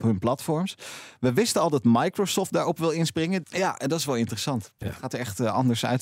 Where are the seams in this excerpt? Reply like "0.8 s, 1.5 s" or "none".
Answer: 3.4 s